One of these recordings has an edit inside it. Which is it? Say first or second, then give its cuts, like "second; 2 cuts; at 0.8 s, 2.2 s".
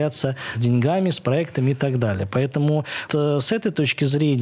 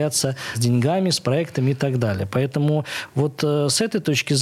first; 1 cut; at 3.1 s